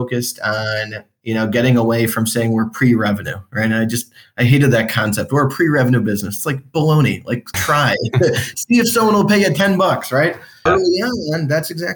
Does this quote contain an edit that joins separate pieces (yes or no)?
yes